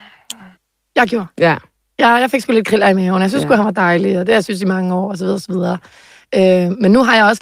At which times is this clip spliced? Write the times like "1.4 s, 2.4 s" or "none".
none